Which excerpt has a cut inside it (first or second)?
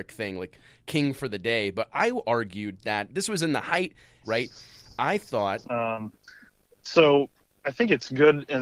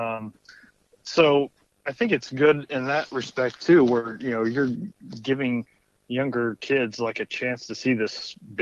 first